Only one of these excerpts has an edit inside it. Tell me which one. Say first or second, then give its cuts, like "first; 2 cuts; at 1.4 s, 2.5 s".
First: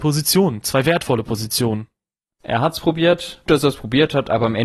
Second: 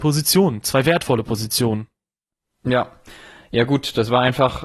first; 2 cuts; at 2.4 s, 3.5 s